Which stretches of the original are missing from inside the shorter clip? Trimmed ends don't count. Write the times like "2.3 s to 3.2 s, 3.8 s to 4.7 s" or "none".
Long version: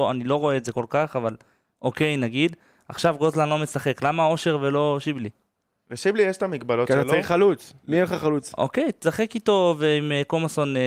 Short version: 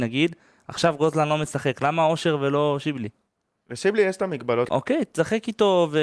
6.9 s to 8.6 s